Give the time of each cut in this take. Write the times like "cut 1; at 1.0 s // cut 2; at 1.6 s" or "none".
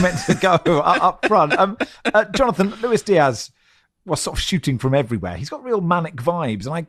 none